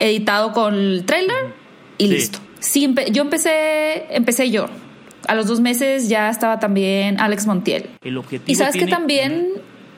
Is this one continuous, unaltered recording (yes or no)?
no